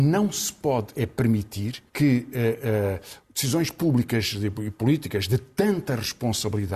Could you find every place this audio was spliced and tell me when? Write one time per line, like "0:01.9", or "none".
0:01.9